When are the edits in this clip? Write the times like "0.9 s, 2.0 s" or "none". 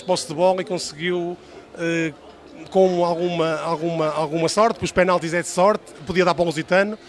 none